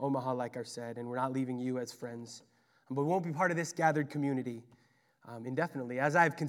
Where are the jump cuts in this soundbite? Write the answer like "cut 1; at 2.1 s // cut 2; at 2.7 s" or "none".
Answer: none